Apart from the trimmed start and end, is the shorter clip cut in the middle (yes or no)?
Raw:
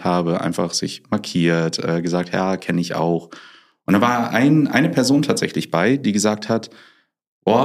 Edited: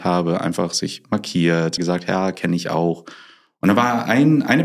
yes